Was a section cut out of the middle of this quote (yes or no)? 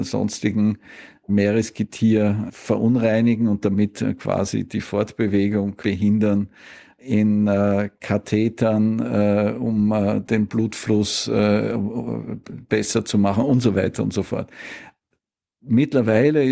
no